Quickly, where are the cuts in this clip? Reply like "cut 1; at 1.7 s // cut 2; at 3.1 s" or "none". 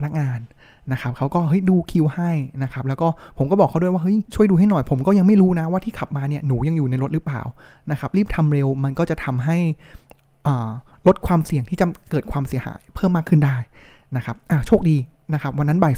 cut 1; at 4.3 s